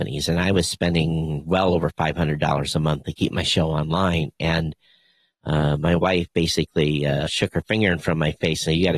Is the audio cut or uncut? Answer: cut